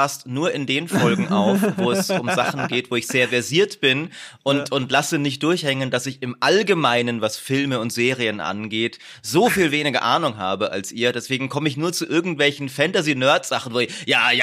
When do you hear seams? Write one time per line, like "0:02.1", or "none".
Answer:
none